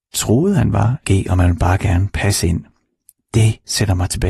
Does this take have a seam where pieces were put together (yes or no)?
yes